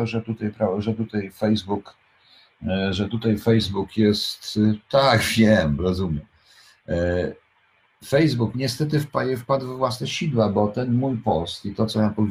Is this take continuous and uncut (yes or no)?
no